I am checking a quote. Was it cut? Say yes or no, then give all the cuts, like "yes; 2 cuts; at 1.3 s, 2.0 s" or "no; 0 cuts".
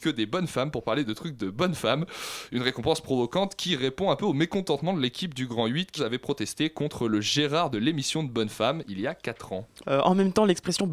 yes; 2 cuts; at 6.0 s, 9.8 s